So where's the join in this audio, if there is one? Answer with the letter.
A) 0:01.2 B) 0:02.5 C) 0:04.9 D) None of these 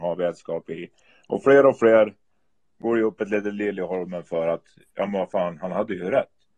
D